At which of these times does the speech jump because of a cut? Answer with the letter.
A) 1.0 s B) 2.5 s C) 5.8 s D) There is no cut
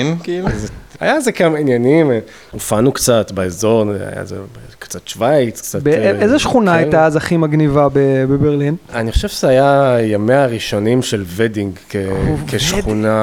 A